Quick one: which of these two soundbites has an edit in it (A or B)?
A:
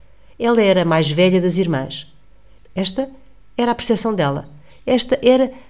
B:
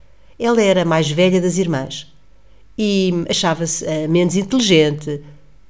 A